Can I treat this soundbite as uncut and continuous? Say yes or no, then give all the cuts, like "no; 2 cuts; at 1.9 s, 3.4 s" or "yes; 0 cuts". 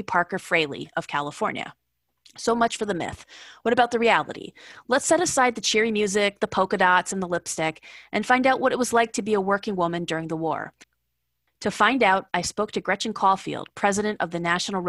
yes; 0 cuts